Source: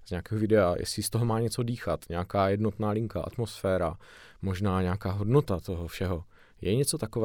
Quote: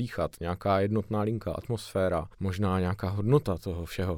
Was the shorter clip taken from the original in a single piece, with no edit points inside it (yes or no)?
no